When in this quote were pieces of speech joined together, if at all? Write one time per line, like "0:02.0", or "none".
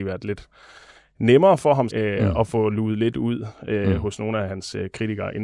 0:01.9